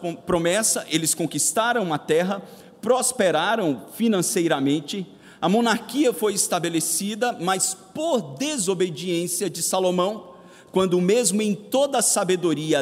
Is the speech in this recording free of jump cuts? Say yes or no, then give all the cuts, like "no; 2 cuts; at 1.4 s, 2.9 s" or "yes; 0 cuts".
yes; 0 cuts